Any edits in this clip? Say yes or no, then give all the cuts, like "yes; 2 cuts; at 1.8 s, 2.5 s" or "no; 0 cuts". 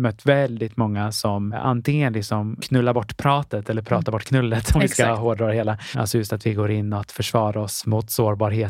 yes; 1 cut; at 5.9 s